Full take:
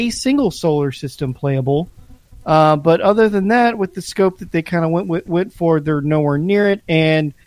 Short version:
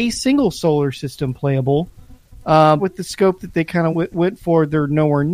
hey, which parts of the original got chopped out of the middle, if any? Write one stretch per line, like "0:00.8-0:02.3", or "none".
0:02.8-0:03.8
0:04.9-0:05.0